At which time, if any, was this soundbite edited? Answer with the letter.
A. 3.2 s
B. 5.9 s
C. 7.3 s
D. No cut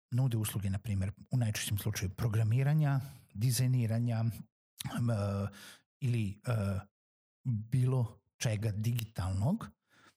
D